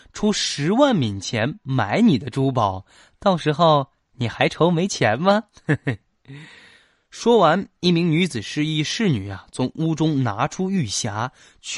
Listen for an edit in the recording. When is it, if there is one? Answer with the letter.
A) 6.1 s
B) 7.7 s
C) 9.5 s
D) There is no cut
D